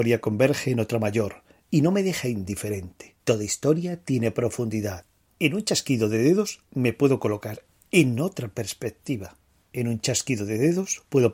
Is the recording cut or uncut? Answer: cut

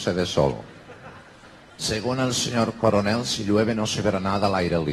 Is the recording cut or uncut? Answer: uncut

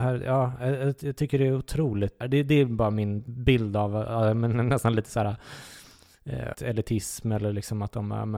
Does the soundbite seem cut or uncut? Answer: cut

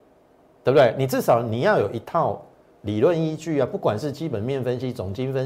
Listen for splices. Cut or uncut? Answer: uncut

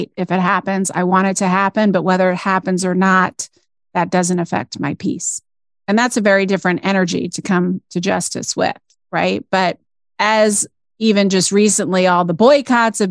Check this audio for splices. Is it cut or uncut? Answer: uncut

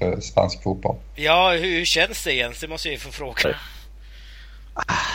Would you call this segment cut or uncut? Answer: cut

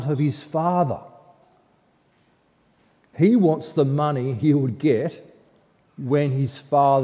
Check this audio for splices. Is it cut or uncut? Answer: uncut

